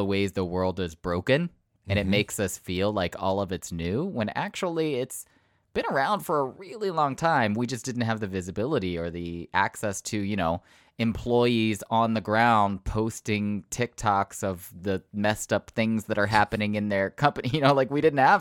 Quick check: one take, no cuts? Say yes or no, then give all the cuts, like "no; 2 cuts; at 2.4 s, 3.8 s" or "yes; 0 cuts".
yes; 0 cuts